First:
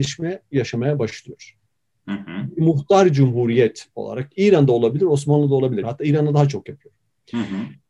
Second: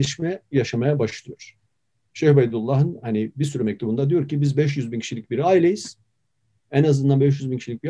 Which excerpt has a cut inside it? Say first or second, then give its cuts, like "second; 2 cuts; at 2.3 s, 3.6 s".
first; 2 cuts; at 2.0 s, 5.8 s